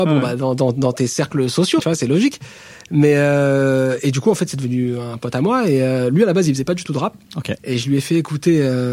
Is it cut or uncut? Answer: cut